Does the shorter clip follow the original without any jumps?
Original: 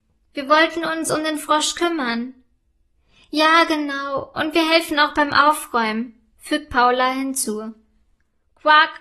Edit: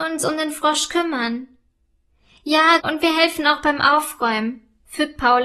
no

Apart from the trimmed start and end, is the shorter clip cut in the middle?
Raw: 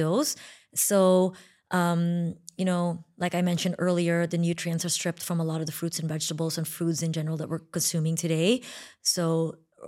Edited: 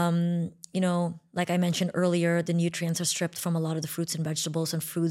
no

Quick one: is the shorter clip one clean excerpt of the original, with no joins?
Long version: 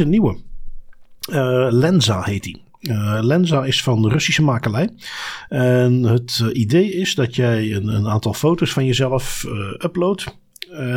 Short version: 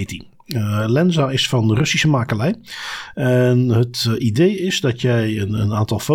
yes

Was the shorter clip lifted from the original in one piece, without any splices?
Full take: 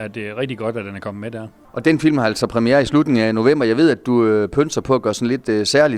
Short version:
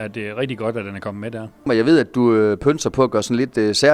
no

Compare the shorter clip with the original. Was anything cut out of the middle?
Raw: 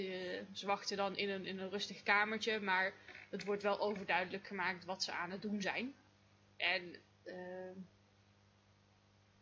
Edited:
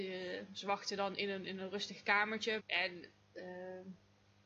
yes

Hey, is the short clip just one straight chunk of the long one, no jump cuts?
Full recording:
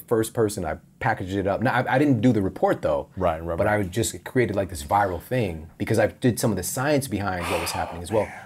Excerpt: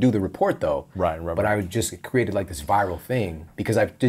yes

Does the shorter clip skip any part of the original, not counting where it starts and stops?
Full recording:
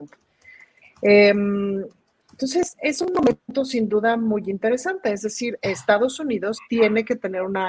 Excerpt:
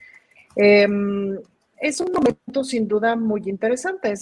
yes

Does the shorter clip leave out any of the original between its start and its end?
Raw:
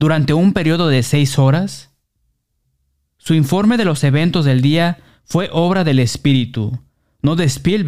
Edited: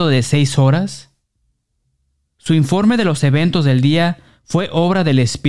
no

